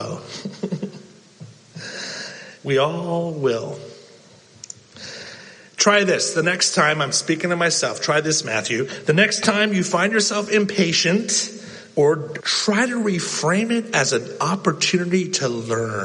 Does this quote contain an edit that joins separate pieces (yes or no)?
yes